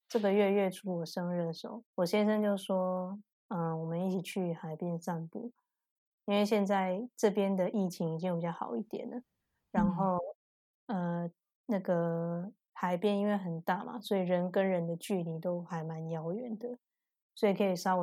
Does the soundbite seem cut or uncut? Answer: cut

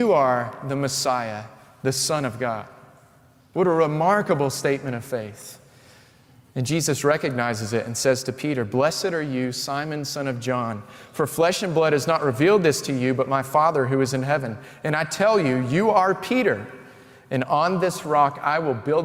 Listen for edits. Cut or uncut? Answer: uncut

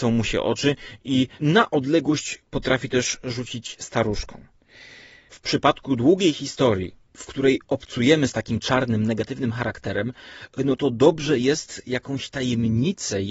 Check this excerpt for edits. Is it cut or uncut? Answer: uncut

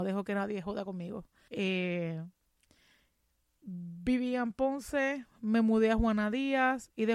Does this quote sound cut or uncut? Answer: cut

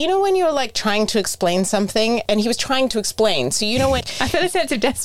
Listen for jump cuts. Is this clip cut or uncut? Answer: cut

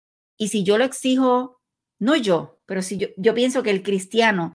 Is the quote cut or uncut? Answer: uncut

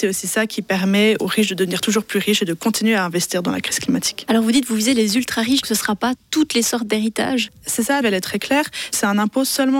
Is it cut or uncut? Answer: cut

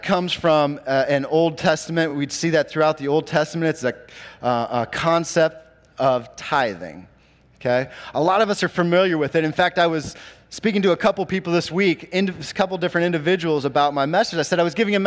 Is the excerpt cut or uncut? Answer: uncut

